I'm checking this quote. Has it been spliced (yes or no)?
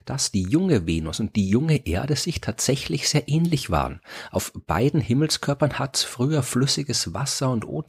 no